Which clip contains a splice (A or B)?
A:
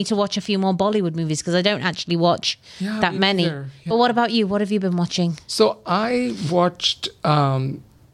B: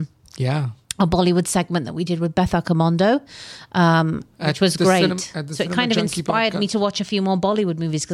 B